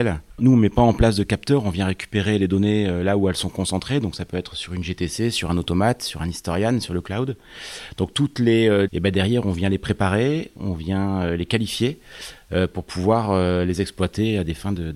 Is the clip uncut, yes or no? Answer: no